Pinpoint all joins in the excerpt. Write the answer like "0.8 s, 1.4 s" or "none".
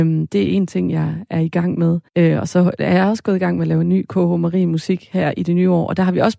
2.1 s